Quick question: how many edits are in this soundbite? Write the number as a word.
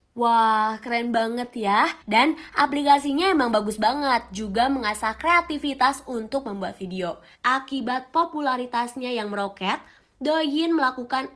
two